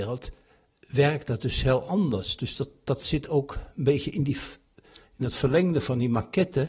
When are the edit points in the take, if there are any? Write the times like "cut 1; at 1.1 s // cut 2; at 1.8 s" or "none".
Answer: none